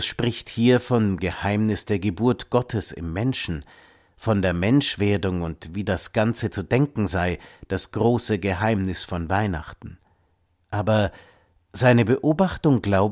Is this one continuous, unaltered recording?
yes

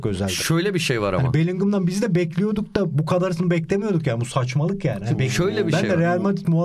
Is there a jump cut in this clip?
no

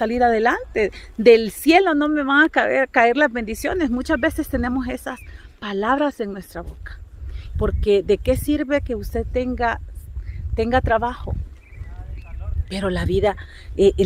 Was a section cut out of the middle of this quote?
yes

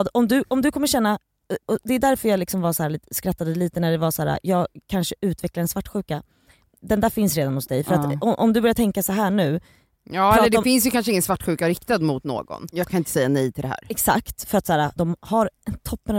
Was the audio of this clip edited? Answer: yes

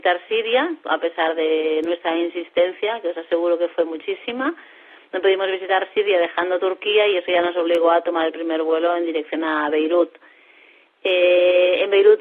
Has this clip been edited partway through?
no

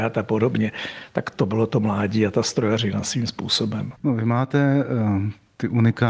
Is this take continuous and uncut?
yes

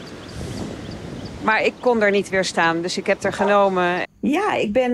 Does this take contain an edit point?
yes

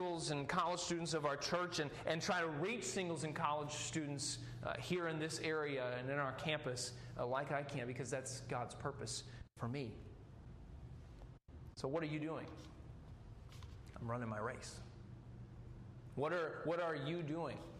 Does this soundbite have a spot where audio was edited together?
no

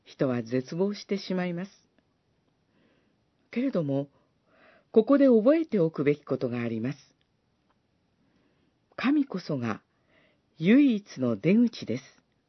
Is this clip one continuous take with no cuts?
yes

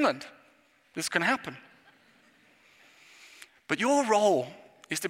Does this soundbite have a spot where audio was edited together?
no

